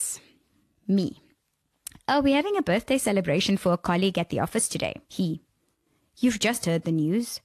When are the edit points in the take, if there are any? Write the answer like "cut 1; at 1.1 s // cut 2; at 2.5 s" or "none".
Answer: cut 1; at 5.0 s